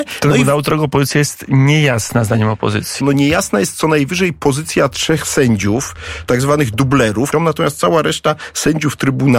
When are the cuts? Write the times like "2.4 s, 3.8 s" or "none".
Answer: 3.0 s, 7.3 s

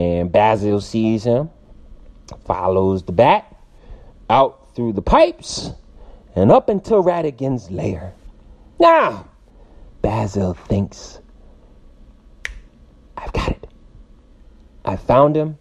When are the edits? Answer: 9.9 s

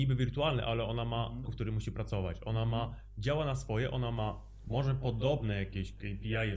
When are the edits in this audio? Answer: 1.5 s

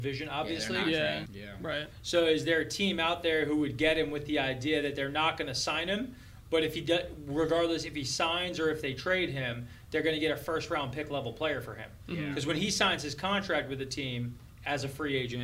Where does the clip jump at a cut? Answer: 1.3 s

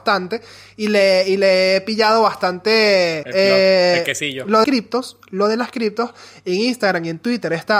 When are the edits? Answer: 3.2 s, 4.6 s

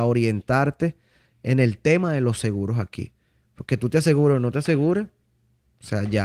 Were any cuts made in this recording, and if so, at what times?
none

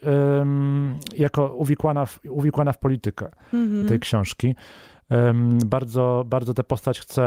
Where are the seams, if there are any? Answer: 3.8 s

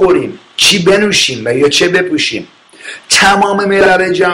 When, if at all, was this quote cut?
none

